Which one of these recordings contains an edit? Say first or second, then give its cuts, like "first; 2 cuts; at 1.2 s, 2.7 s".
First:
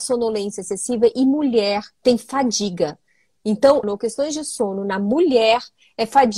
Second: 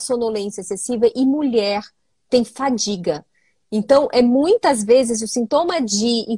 first; 2 cuts; at 1.9 s, 3.8 s